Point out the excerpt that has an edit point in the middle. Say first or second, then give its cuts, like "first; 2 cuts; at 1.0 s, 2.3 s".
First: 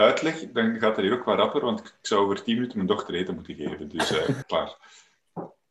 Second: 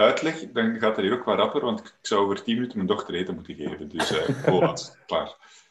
first; 1 cut; at 4.4 s